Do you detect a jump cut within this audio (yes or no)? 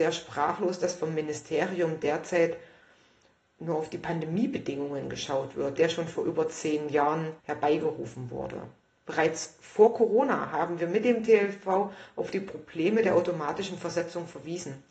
yes